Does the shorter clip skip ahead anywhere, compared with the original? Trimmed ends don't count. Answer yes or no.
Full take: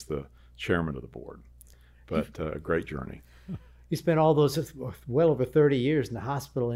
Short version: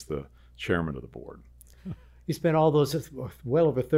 yes